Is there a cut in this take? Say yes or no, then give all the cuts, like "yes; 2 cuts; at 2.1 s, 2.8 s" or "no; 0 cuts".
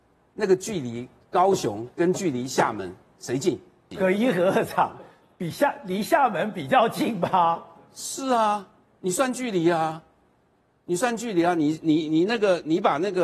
yes; 1 cut; at 3.9 s